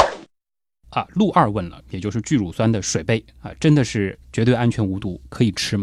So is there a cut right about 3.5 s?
no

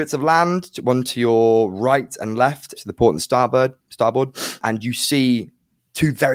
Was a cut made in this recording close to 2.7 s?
yes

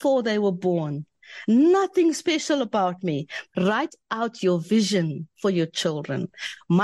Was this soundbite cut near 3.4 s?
yes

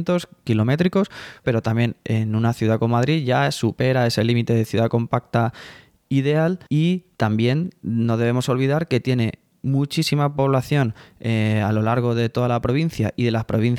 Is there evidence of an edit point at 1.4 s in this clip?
yes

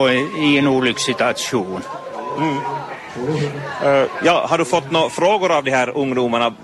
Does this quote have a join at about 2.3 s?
no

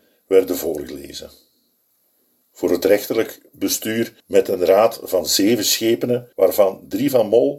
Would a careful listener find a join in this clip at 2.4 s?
yes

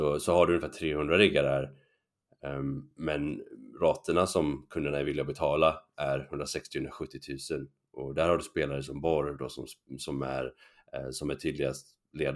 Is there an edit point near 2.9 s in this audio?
no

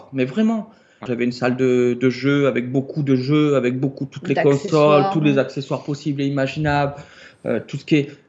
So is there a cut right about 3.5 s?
no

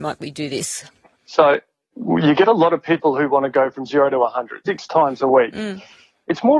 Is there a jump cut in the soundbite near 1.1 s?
no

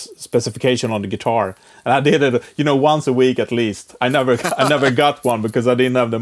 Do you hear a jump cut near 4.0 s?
no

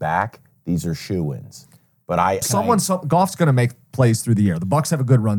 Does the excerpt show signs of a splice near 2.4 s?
yes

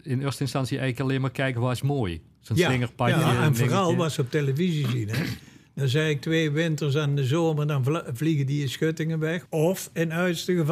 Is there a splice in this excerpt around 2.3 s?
no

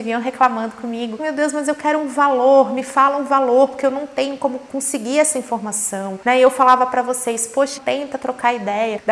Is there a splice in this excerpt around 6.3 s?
no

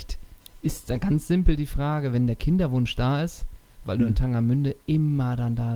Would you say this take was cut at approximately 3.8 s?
yes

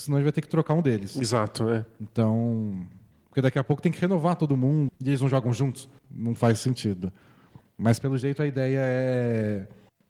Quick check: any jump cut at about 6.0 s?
yes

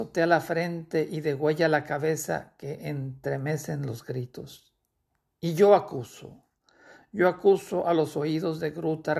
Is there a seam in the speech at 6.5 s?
no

